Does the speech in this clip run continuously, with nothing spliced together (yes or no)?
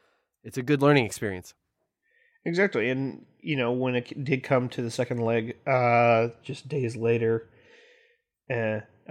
yes